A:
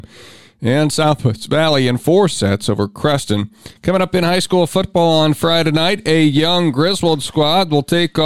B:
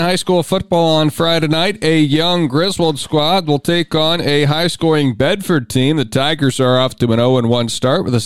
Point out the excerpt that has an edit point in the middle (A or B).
A